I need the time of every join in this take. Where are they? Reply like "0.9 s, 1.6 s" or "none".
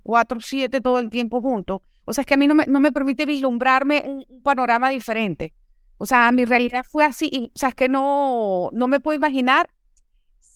none